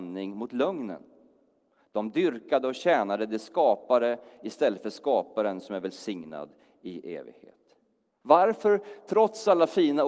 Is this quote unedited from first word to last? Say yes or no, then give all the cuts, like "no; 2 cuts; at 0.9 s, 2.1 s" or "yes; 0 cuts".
no; 1 cut; at 8.1 s